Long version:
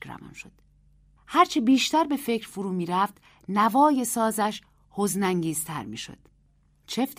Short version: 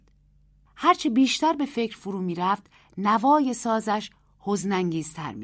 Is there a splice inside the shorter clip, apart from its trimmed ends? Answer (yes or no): no